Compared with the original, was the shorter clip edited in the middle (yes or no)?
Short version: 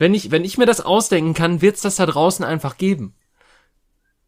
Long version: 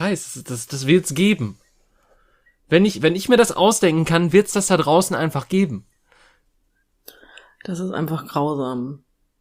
no